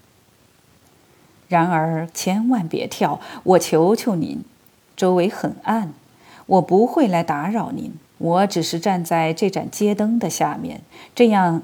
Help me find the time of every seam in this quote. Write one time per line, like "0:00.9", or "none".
0:02.1
0:08.1